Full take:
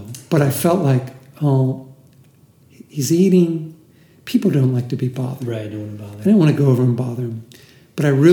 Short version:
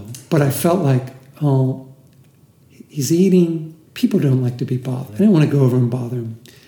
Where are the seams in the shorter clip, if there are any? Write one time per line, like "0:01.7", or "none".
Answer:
0:03.9
0:05.1